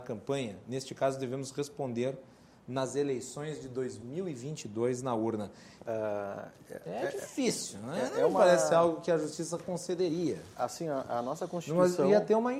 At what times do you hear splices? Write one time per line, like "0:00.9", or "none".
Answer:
0:05.8